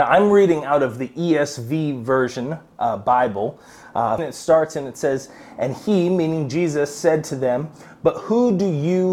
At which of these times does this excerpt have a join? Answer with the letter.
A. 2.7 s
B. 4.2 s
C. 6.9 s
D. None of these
B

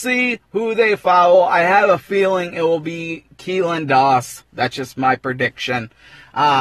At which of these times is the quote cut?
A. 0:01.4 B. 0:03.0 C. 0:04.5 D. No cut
D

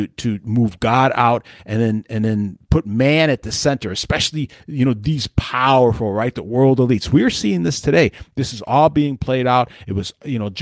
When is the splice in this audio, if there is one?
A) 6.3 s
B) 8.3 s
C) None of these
C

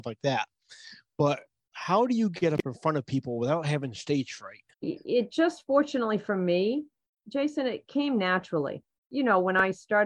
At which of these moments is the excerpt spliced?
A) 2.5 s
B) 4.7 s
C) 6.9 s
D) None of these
B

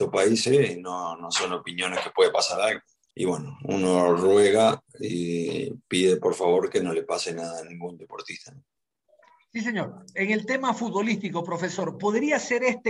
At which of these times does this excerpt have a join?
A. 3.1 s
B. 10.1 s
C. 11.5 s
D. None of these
A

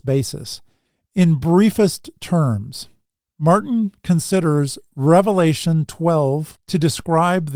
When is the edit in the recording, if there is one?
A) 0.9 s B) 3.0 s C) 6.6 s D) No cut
C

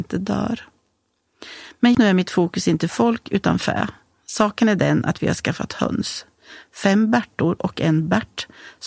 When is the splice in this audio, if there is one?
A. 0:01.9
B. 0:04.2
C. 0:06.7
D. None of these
A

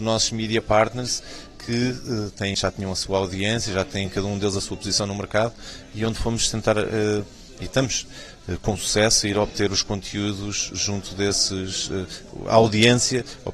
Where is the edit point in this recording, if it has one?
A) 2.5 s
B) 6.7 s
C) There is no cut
A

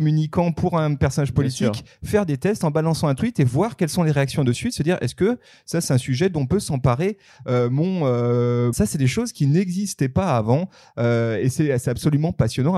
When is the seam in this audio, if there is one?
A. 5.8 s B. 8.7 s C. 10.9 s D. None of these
B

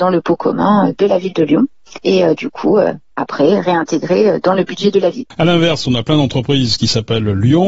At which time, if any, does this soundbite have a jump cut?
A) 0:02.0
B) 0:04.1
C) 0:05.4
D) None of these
D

